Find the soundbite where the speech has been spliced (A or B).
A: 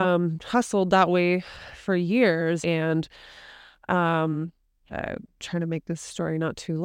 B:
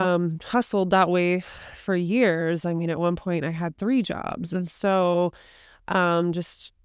A